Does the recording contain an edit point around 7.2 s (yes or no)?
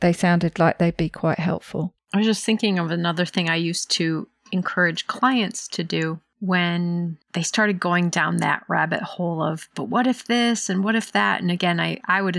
yes